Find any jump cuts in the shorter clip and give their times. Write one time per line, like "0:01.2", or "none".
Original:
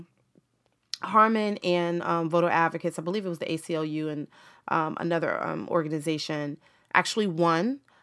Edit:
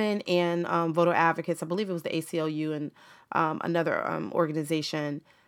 none